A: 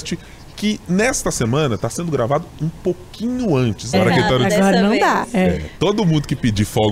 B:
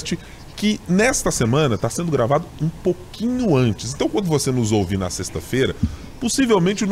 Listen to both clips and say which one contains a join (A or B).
A